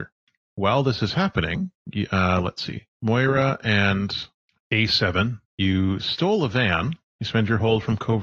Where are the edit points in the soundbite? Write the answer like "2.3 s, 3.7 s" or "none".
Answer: 7.1 s